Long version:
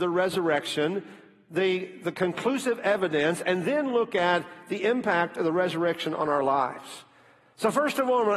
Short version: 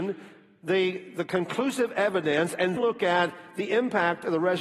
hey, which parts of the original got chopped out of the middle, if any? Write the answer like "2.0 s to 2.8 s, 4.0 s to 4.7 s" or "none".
3.6 s to 3.9 s